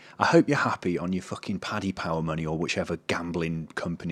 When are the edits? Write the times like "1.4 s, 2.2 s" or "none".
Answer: none